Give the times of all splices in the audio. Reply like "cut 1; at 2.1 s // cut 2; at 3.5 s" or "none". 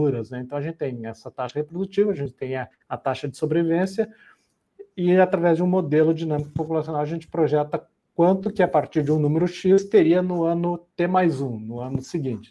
none